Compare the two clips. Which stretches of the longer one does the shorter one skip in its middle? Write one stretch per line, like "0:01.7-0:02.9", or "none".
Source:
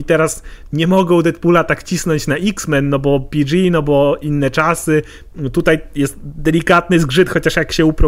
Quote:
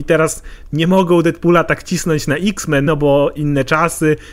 0:02.9-0:03.7